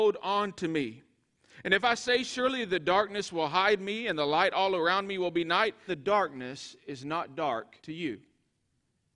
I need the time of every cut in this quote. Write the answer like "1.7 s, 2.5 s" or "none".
5.9 s, 7.8 s